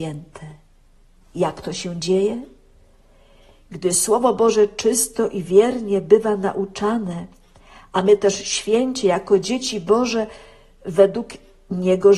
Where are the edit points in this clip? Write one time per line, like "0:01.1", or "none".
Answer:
none